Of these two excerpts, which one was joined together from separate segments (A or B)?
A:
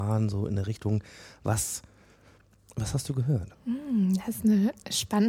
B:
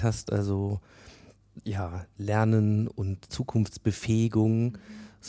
A